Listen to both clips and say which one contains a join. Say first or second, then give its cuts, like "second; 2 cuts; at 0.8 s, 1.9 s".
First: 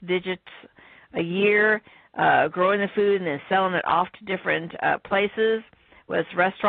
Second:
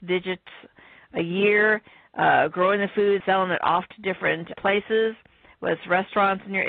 second; 2 cuts; at 3.2 s, 4.5 s